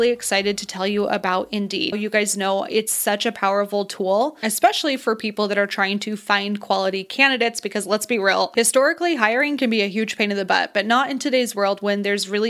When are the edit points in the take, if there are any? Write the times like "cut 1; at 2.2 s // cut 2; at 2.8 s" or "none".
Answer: cut 1; at 1.9 s